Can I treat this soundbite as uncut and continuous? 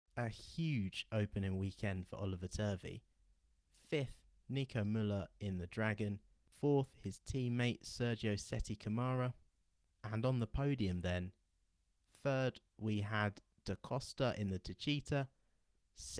yes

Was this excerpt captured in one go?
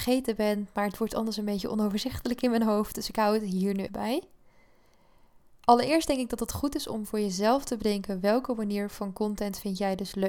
no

